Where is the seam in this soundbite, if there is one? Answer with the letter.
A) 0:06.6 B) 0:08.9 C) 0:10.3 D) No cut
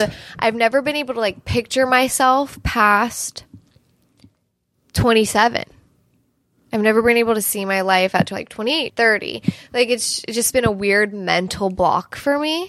B